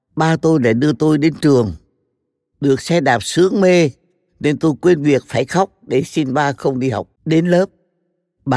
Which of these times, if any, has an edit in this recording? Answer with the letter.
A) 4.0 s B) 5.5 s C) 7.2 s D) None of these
C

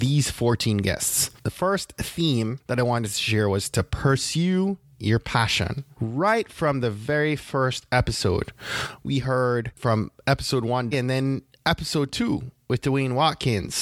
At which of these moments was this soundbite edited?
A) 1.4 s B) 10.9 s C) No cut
B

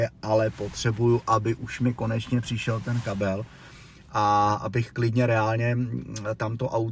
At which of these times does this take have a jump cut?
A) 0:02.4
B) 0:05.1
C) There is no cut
C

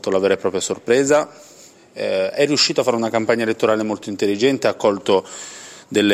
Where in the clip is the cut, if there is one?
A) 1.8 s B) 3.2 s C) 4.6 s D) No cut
D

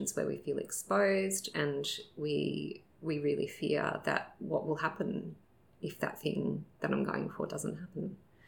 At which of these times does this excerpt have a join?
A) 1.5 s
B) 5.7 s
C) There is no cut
A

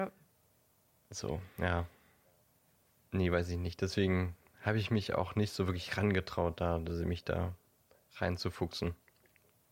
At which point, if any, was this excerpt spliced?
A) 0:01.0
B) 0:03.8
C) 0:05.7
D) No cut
D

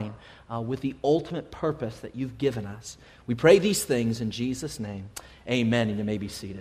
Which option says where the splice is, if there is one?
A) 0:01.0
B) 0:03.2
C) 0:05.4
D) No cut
D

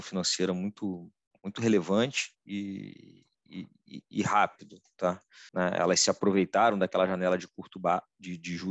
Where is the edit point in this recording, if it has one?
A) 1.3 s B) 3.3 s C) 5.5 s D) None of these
C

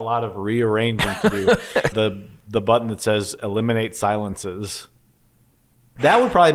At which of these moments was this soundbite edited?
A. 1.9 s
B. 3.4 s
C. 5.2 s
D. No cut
A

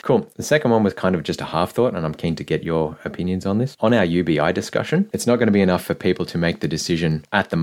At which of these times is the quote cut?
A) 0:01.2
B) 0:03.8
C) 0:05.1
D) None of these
C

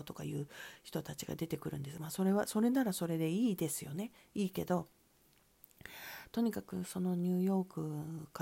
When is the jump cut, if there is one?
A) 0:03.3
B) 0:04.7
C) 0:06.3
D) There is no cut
D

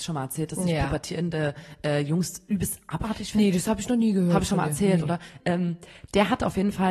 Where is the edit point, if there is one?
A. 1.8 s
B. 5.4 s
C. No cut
B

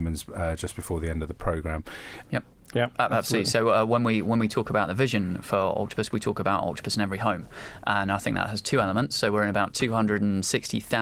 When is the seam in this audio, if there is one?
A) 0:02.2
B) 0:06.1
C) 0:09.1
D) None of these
A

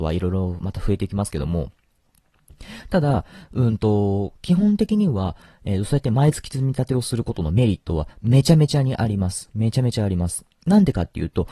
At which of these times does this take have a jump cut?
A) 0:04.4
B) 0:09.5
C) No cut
C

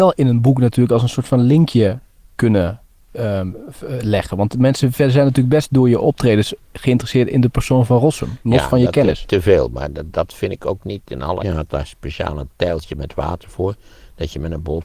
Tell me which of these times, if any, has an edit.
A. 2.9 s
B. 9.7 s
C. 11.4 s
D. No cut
C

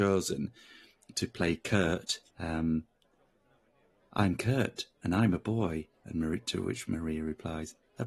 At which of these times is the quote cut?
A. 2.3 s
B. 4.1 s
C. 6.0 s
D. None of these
A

